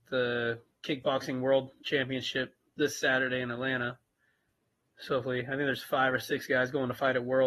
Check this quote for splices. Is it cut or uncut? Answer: uncut